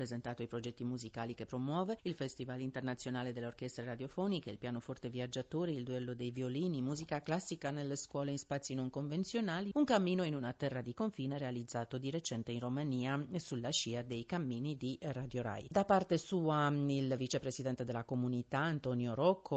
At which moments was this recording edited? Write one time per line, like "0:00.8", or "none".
0:09.7